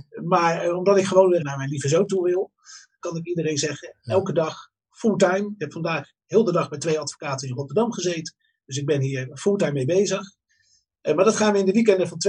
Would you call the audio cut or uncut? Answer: cut